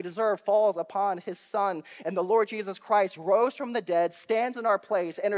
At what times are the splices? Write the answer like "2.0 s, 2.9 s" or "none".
none